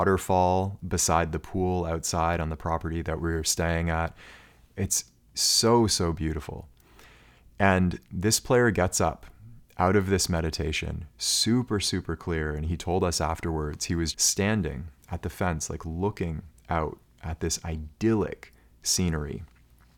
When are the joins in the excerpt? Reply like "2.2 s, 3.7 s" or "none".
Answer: 14.1 s